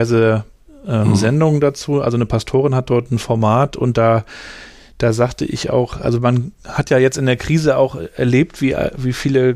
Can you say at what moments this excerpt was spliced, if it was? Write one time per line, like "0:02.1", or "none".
none